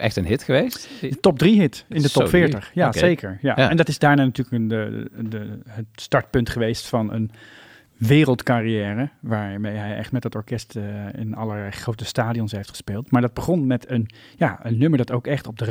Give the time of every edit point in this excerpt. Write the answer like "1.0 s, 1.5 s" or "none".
none